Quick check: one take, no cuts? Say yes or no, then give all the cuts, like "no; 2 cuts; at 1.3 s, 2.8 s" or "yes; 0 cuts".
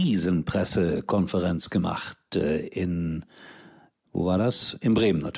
yes; 0 cuts